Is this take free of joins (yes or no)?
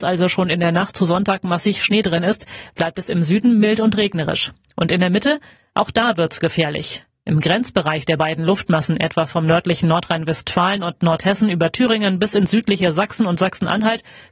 yes